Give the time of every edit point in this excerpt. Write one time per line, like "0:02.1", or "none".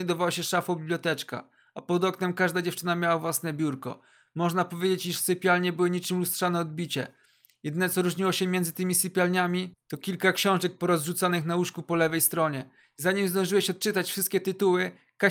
none

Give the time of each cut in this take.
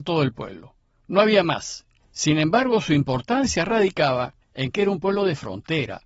0:02.0
0:04.4

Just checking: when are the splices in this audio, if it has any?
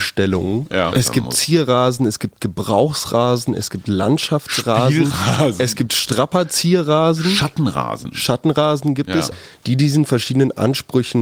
0:00.9
0:09.3

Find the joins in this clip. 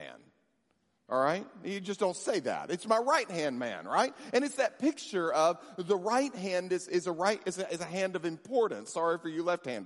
none

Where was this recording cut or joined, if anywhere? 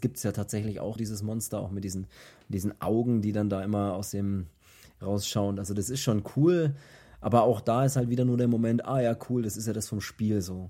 0:01.0

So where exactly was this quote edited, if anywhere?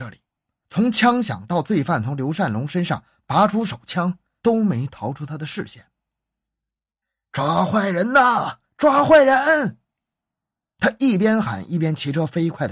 none

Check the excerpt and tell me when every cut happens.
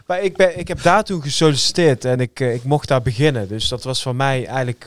none

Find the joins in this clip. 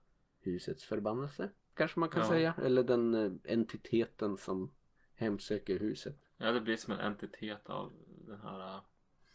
none

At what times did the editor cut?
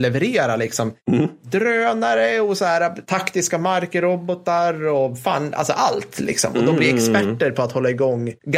none

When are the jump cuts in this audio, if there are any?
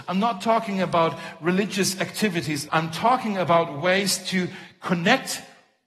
0:02.7

